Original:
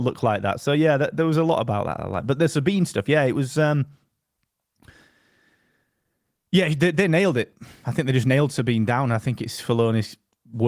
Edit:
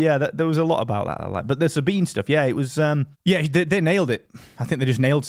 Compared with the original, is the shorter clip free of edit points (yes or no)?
no